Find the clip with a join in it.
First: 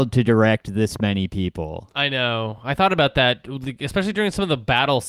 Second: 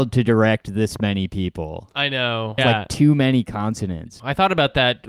second; 2 cuts; at 2.6 s, 4.2 s

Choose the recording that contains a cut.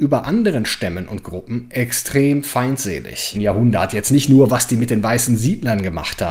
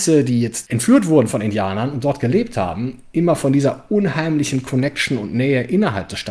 first; 1 cut; at 3.3 s

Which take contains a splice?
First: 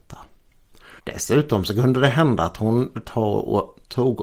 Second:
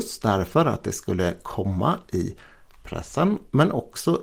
first; 1 cut; at 1.0 s

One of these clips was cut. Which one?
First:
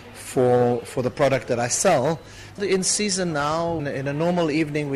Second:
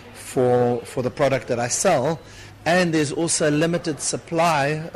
first; 2 cuts; at 2.6 s, 3.8 s

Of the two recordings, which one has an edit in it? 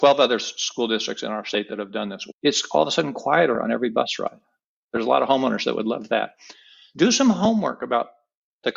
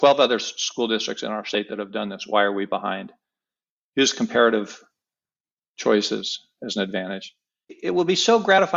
first; 1 cut; at 2.3 s

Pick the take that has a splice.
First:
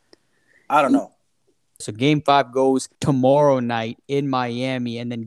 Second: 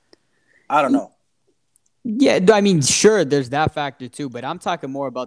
first; 2 cuts; at 1.8 s, 2.9 s

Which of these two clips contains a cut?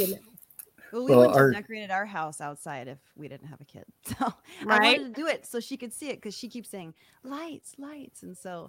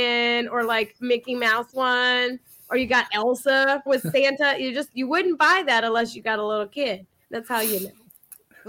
second; 2 cuts; at 3.9 s, 7.2 s

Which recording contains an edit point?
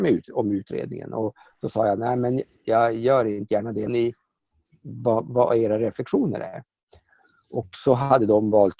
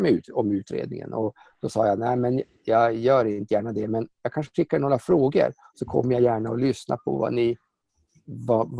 first; 1 cut; at 3.9 s

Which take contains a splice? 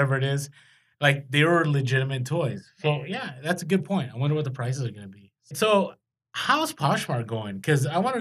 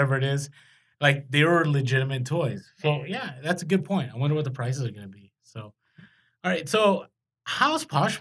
first; 1 cut; at 5.5 s

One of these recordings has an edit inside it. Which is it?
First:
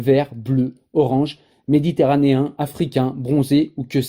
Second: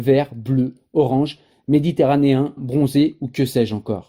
second; 1 cut; at 2.6 s

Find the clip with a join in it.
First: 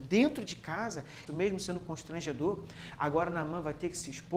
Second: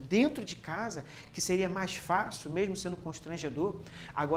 first; 1 cut; at 1.3 s

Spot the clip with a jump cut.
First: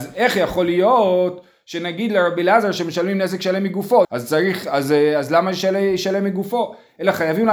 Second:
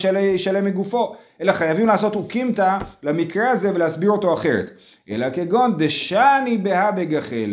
first; 1 cut; at 4.0 s

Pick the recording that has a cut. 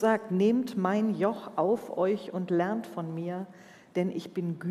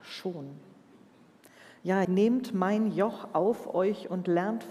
second; 1 cut; at 2.1 s

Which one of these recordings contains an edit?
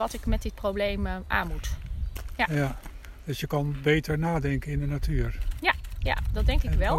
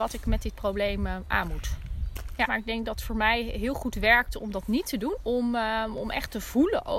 second; 2 cuts; at 2.5 s, 5.2 s

